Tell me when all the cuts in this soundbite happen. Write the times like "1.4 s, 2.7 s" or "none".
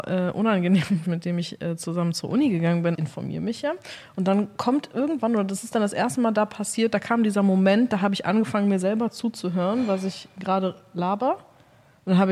1.0 s, 2.9 s